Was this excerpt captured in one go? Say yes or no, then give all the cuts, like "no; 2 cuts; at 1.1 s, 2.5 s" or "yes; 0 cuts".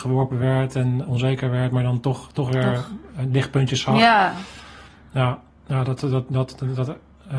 yes; 0 cuts